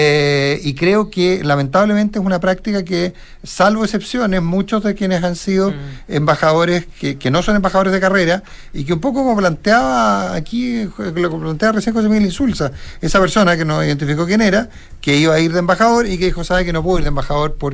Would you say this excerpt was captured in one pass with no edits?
yes; 0 cuts

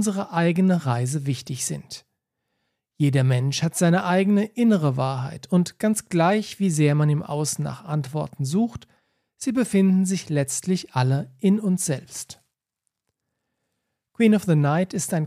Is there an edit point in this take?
no; 0 cuts

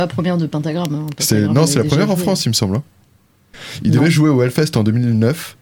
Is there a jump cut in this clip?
no; 0 cuts

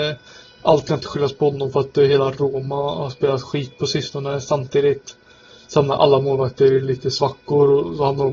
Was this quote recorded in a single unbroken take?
yes; 0 cuts

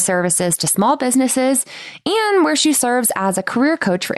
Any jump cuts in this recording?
no; 0 cuts

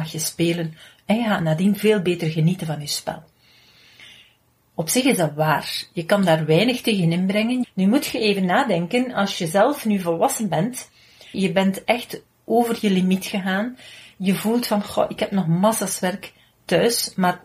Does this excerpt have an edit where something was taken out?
yes; 2 cuts; at 7.6 s, 11.3 s

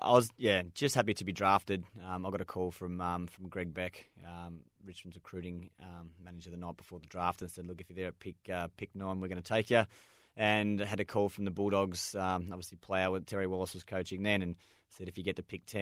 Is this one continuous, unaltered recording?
yes; 0 cuts

